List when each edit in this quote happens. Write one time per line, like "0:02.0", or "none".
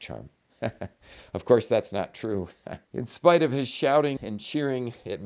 0:02.8
0:04.2